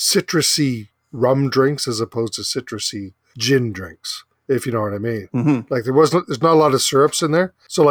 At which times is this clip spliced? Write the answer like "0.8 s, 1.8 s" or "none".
none